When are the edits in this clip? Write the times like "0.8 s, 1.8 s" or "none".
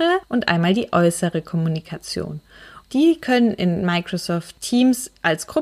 2.8 s